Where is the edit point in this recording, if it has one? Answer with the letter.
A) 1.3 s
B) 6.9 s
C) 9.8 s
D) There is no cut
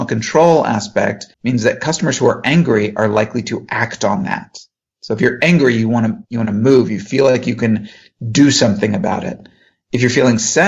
A